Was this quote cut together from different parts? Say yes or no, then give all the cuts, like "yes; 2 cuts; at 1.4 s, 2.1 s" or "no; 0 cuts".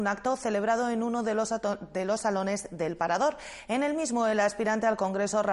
no; 0 cuts